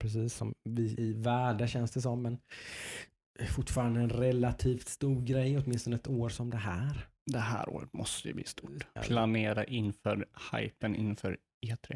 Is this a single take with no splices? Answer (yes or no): no